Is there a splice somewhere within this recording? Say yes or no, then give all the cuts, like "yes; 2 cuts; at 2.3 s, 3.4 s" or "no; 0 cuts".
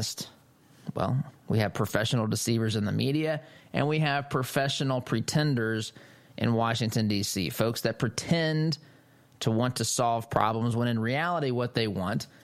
no; 0 cuts